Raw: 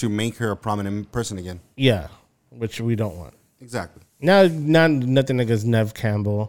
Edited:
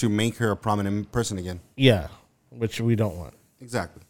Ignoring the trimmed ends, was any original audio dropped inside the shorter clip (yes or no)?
no